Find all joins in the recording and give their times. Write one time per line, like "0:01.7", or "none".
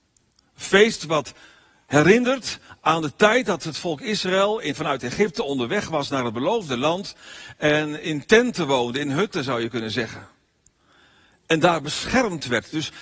0:04.7